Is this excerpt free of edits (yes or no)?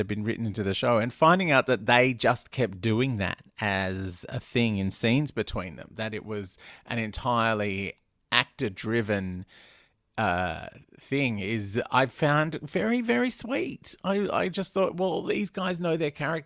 yes